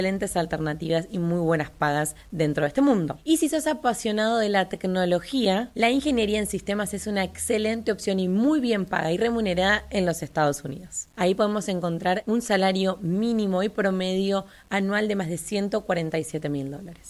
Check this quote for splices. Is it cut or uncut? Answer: cut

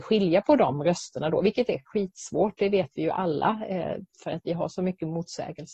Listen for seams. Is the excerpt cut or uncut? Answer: uncut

